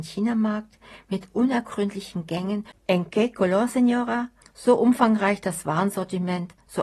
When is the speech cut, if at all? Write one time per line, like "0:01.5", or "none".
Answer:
0:02.8
0:04.4